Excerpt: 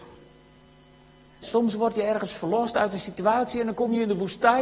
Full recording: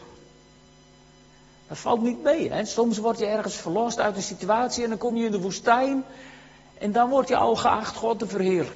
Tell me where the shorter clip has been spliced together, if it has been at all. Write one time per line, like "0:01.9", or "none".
0:01.4